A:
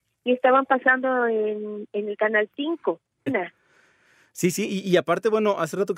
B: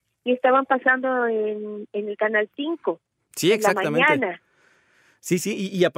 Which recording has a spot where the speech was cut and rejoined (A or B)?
A